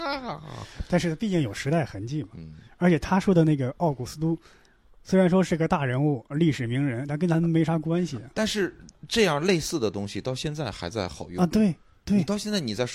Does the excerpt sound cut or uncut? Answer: uncut